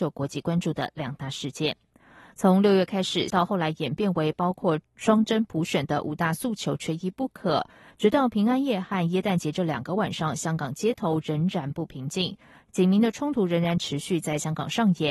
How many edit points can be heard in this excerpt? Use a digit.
1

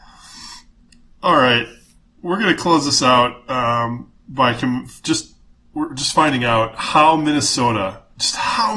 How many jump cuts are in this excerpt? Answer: 0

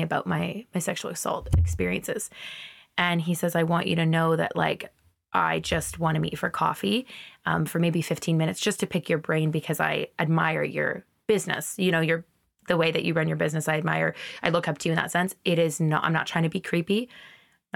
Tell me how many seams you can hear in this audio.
0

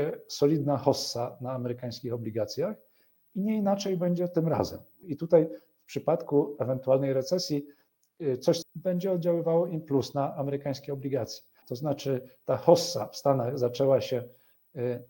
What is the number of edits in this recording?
3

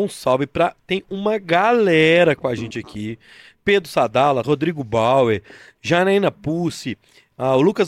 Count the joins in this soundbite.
1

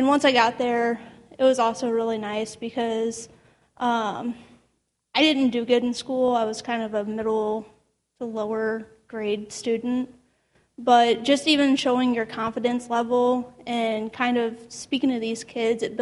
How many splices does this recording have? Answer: 0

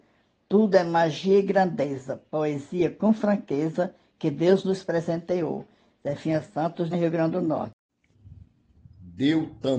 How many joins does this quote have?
2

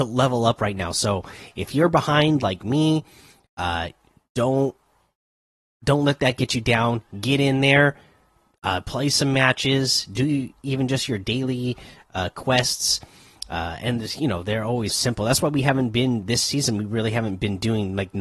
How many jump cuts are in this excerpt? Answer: 1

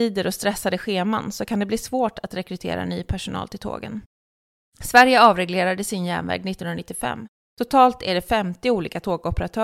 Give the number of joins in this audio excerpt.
2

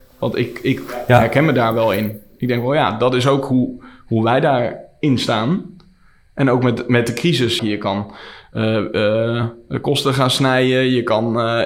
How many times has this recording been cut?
1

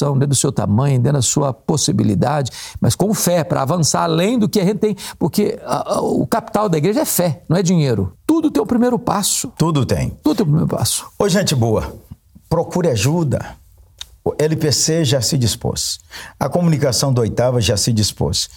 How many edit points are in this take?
1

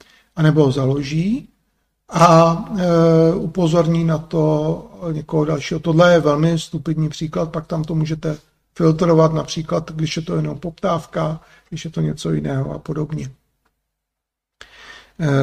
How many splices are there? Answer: 0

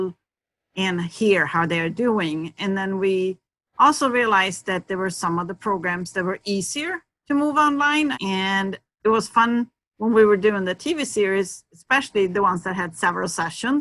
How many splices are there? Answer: 1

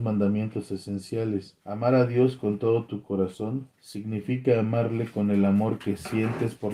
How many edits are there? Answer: 2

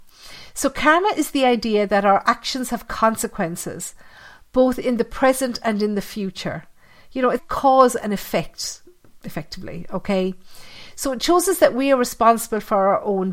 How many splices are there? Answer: 1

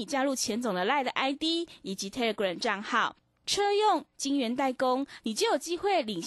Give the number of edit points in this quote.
2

